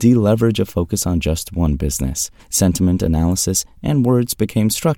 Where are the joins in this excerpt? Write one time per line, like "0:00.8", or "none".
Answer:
0:02.4